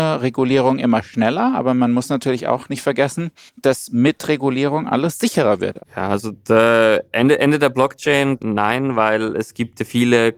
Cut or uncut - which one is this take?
cut